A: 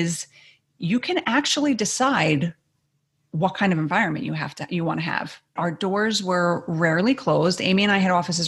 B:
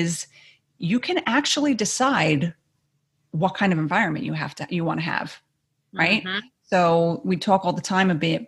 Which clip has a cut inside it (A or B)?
A